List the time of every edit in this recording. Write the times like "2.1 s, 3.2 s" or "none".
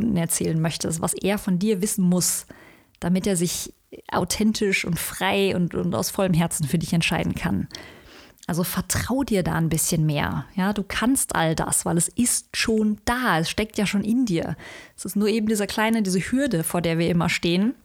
none